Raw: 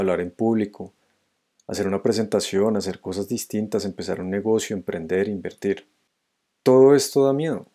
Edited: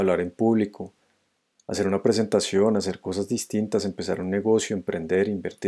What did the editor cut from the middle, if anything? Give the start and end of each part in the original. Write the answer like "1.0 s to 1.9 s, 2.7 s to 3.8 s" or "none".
none